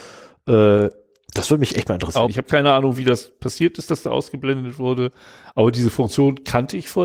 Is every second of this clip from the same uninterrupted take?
no; 1 cut; at 2.3 s

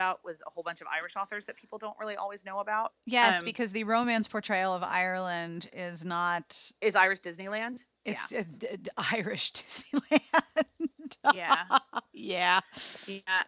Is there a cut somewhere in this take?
no; 0 cuts

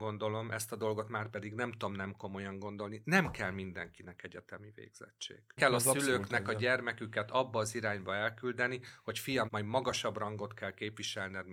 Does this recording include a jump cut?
yes; 2 cuts; at 5.6 s, 9.5 s

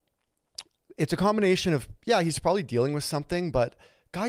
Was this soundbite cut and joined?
no; 0 cuts

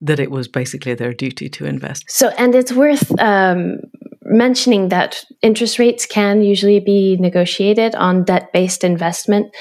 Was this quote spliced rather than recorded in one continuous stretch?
yes; 2 cuts; at 2.0 s, 5.3 s

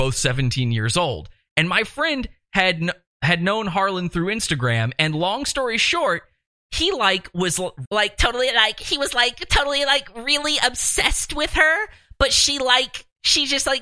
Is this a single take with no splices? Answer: no; 1 cut; at 7.8 s

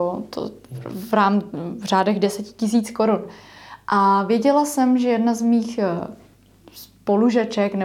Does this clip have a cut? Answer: no; 0 cuts

